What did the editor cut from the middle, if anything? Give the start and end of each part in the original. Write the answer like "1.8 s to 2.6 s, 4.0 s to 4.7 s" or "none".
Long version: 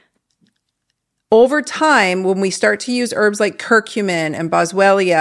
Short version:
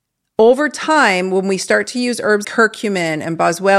3.4 s to 3.6 s